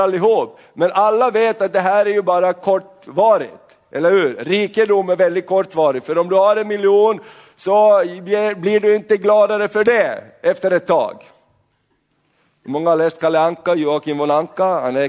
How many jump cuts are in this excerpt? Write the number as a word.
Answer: zero